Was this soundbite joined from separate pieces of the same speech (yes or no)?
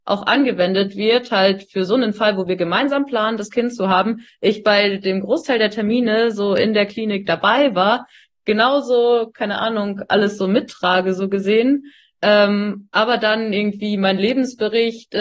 no